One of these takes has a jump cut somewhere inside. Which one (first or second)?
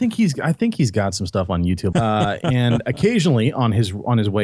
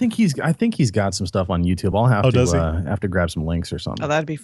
first